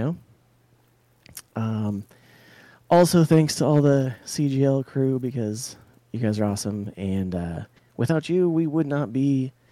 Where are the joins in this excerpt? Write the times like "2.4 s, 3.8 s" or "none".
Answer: none